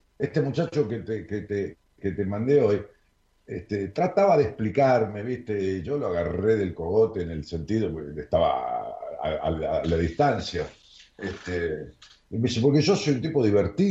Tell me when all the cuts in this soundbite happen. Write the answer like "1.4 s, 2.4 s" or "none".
none